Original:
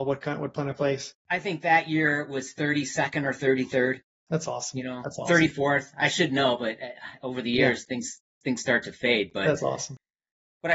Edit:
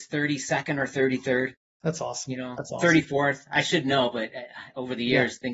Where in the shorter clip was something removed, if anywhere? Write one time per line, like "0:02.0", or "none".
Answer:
none